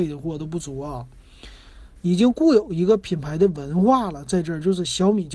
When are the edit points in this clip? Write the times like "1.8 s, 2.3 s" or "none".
2.0 s